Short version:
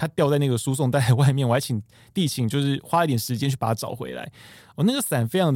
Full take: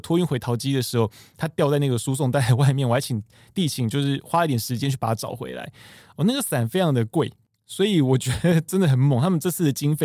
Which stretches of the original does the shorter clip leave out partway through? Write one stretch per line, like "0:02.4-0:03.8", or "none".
none